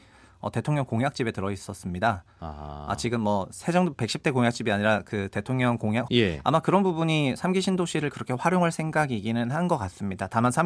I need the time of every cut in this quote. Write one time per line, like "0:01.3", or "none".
0:06.1